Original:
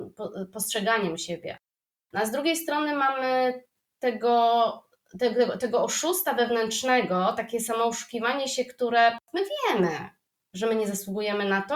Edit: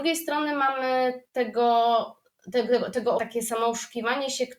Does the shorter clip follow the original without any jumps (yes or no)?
no